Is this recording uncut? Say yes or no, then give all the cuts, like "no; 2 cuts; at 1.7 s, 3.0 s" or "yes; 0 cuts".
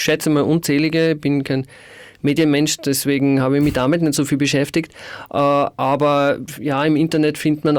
yes; 0 cuts